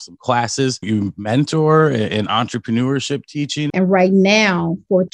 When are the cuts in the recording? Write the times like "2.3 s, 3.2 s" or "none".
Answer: 3.7 s